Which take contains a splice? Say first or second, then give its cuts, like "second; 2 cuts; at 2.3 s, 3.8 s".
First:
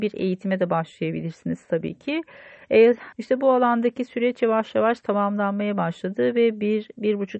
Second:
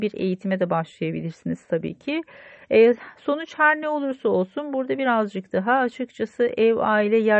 first; 1 cut; at 3.1 s